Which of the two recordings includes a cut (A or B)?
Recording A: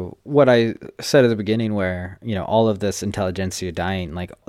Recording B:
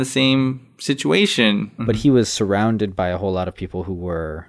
B